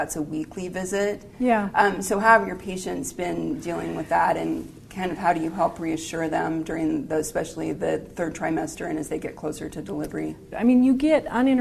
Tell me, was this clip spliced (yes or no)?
yes